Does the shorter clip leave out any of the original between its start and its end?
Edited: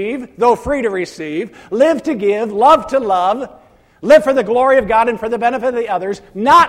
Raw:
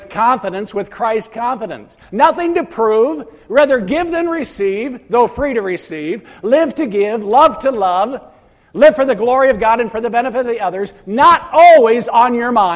no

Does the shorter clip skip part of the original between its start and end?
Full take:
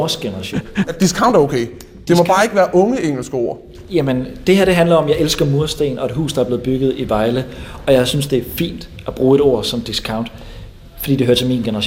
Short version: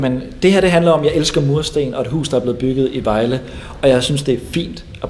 no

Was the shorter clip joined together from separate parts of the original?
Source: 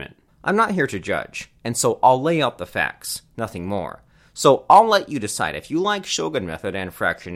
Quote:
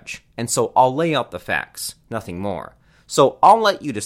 no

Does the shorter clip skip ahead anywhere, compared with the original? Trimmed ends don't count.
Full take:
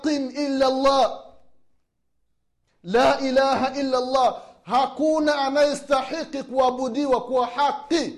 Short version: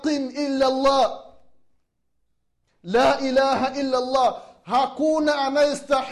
no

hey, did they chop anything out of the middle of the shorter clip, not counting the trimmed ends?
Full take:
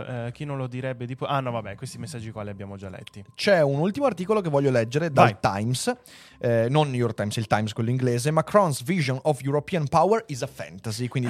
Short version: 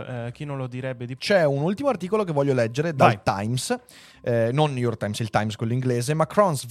yes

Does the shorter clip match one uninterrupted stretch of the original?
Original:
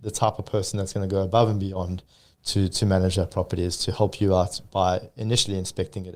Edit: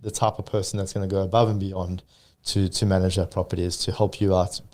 yes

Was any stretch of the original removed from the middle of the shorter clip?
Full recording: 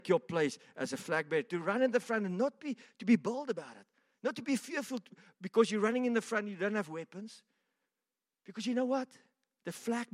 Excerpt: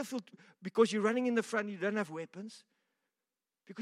no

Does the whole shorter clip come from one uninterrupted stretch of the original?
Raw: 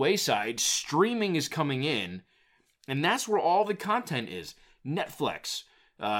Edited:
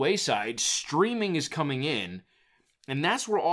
yes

